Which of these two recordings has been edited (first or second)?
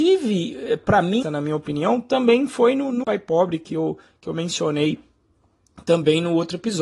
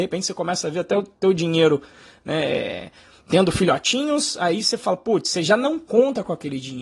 first